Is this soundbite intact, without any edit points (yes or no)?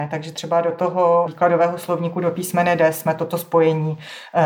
no